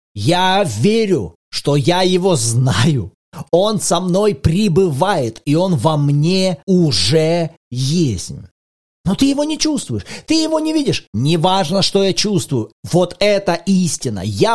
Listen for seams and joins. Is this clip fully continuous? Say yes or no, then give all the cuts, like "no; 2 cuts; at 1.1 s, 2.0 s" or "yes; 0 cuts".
yes; 0 cuts